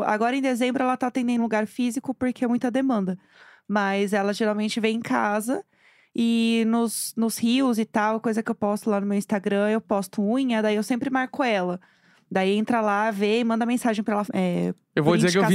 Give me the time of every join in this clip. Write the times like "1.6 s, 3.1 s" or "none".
1.4 s, 14.2 s